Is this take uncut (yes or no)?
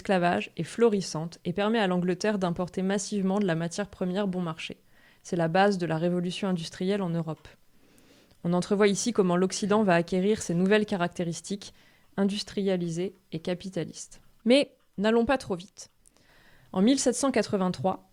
yes